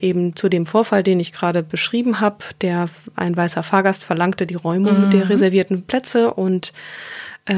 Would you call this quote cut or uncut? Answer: uncut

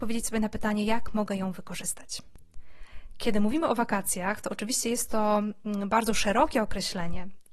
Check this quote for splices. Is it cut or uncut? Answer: uncut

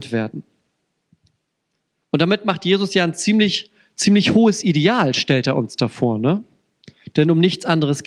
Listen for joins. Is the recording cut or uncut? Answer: uncut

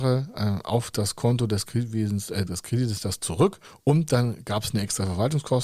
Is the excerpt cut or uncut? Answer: cut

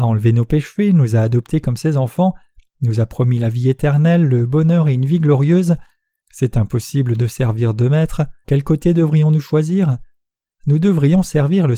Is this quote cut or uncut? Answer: cut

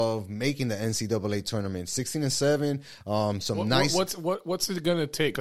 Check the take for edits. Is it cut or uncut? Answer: uncut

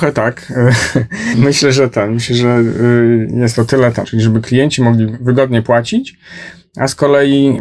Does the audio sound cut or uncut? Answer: cut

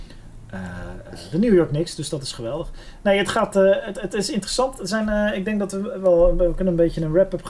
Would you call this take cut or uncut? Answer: uncut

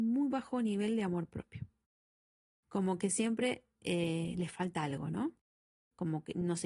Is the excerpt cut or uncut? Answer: uncut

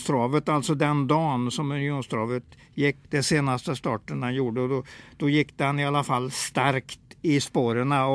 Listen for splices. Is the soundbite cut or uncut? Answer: cut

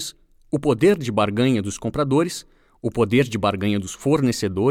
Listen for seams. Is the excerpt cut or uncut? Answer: uncut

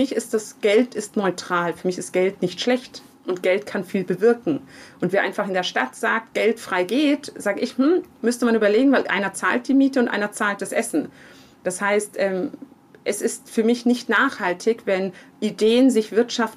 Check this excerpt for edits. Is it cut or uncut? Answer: uncut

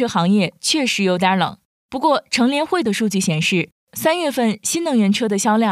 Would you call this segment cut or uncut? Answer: uncut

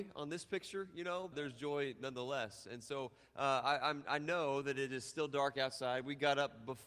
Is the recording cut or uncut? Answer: cut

